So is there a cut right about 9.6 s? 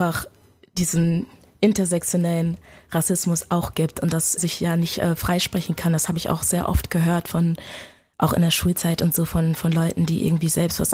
no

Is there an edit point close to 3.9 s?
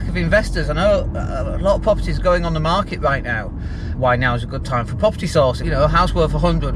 yes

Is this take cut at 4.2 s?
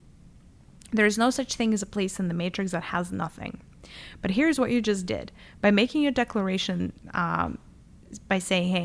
no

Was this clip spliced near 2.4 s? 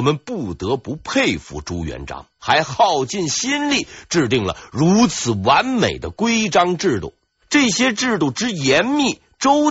yes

